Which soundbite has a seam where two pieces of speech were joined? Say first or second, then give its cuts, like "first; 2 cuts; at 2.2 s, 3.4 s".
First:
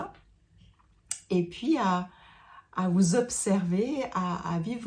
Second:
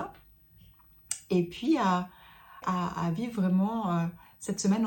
second; 1 cut; at 2.6 s